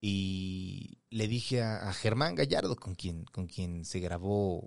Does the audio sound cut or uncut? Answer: cut